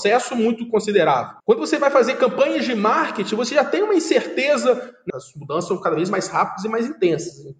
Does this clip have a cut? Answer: yes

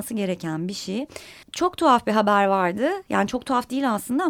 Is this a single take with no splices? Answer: no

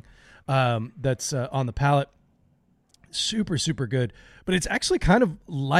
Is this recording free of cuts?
yes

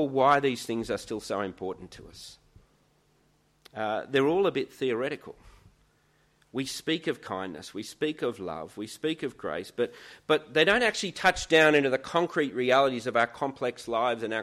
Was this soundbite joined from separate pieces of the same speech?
no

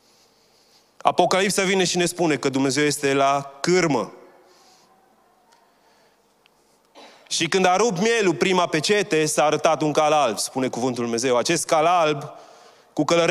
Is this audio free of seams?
yes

